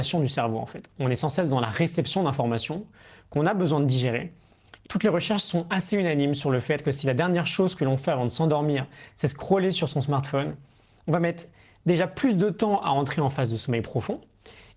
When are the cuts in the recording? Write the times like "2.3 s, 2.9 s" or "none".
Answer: 4.8 s